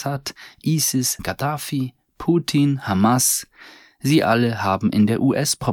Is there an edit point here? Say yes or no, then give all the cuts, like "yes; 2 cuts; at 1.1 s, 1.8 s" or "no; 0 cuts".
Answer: yes; 1 cut; at 1.2 s